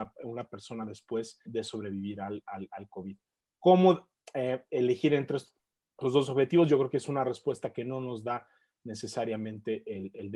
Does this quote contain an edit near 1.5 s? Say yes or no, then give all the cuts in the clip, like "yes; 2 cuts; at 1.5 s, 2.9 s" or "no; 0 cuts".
yes; 1 cut; at 1.5 s